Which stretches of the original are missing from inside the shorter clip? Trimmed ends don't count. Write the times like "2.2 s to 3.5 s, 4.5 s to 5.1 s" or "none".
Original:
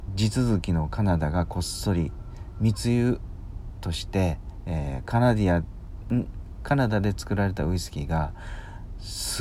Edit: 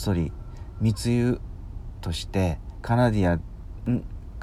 4.6 s to 5.1 s